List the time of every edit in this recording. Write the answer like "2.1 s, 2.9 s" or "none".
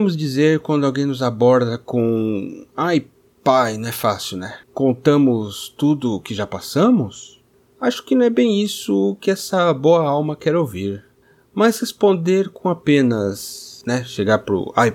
4.6 s